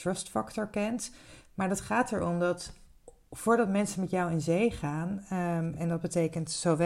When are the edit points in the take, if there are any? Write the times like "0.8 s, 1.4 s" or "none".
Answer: none